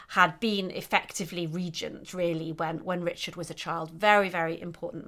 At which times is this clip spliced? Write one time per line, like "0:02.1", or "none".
none